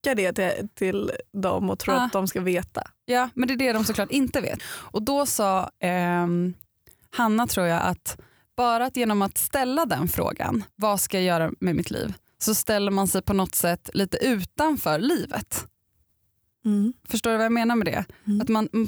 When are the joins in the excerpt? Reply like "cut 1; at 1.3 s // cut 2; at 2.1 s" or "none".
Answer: cut 1; at 4.6 s